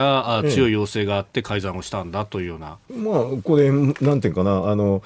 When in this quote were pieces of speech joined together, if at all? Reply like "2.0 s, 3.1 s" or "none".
2.9 s

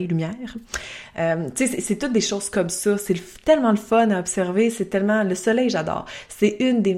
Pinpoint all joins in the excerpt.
none

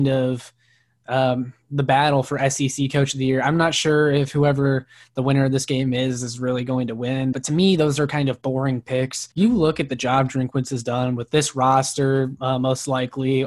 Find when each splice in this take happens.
7.3 s, 9.3 s, 12.4 s

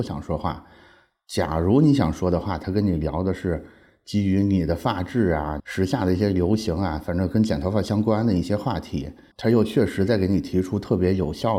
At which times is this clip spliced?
5.6 s, 9.3 s

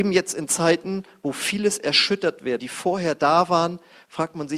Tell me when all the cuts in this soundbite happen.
2.6 s

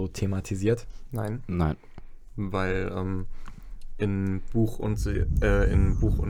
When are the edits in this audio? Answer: none

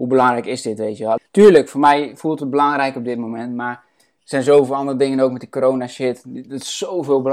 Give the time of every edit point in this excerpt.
1.2 s

